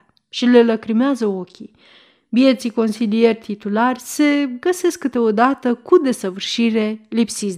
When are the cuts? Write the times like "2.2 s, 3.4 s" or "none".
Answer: none